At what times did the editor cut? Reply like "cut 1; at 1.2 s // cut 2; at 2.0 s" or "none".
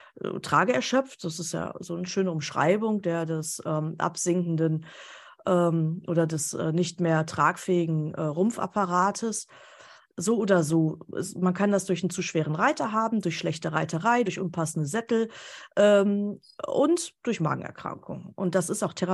none